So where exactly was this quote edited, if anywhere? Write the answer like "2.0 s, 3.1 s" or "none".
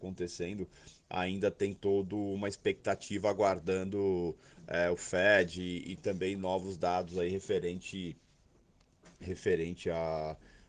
none